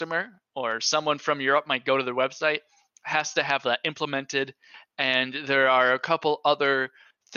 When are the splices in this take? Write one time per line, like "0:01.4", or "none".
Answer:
none